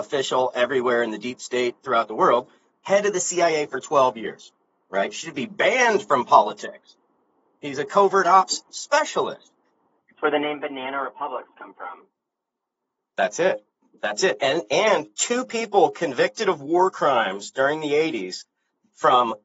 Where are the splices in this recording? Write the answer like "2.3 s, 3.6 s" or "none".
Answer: 10.0 s